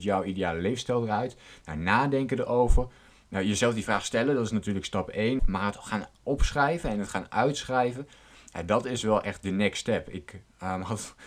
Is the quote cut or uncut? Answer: cut